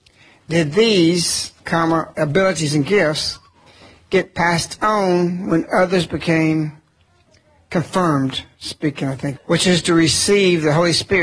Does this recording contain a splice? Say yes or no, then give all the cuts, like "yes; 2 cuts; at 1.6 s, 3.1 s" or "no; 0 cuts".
yes; 1 cut; at 9.4 s